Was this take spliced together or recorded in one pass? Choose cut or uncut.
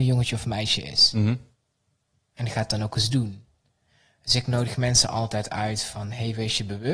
cut